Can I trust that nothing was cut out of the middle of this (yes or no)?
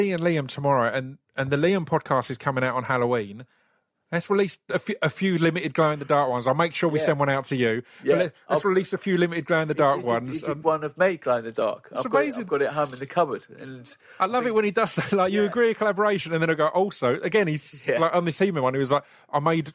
yes